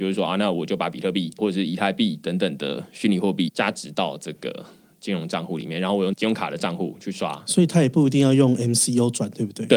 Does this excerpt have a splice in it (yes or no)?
no